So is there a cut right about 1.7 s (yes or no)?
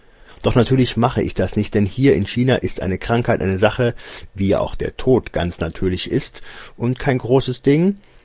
no